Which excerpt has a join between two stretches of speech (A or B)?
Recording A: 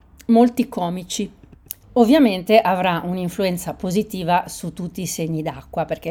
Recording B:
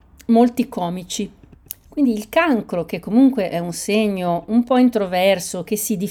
A